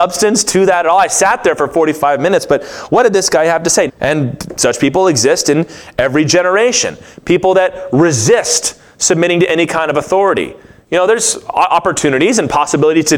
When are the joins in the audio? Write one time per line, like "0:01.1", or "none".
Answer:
0:03.9